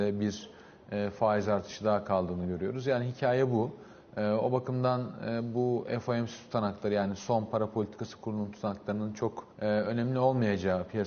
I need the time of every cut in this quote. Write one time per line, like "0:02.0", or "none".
0:09.5